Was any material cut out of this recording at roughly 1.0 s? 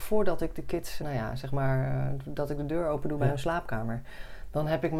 yes; 1 cut; at 1.0 s

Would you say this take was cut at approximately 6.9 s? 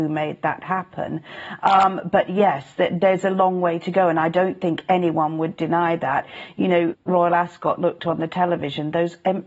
yes; 1 cut; at 6.9 s

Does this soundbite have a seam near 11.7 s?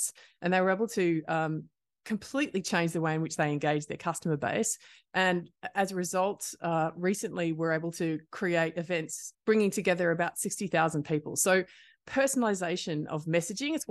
no; 1 cut; at 9.3 s

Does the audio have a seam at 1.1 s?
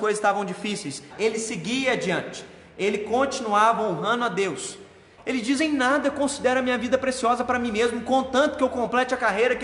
yes; 2 cuts; at 1.1 s, 5.2 s

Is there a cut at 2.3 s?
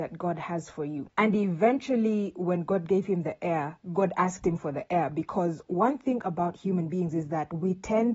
no; 1 cut; at 1.1 s

